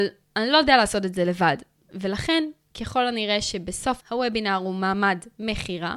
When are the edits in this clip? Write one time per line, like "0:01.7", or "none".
0:04.0